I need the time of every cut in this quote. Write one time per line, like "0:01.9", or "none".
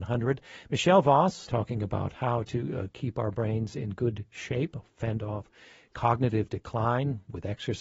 0:01.5